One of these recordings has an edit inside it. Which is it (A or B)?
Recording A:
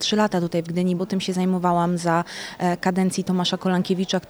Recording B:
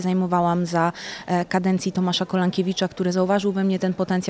A